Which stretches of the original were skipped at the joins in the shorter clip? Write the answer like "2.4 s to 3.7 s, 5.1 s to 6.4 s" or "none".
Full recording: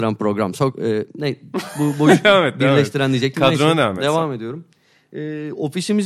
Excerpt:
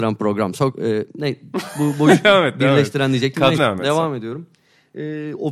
3.6 s to 3.8 s